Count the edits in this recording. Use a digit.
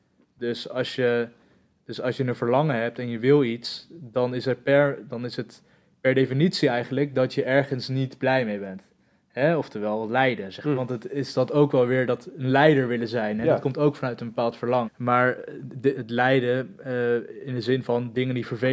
3